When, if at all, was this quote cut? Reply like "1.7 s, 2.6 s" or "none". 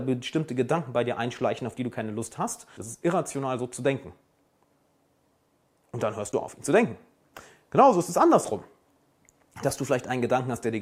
2.8 s